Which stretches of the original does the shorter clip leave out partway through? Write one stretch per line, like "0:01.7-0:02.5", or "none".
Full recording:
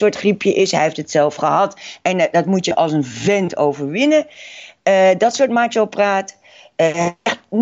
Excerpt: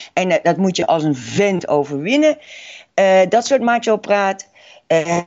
none